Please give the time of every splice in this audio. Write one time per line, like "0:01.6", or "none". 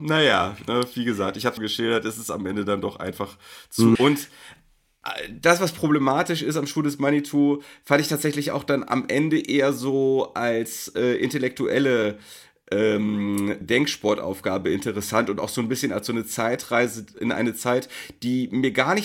0:01.6
0:04.0
0:13.6